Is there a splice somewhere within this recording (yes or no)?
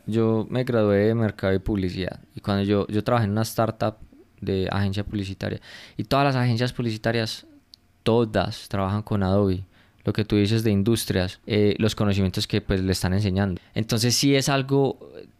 yes